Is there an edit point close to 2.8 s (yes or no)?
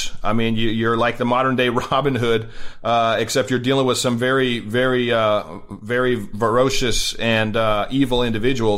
no